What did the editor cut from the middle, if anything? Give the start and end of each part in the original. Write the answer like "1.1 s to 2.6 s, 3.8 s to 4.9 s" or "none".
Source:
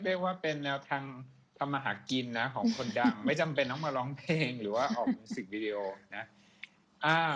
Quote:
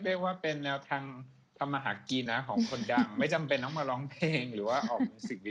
2.3 s to 2.3 s